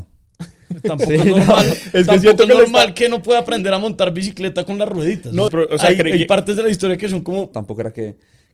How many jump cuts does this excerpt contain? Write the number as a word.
two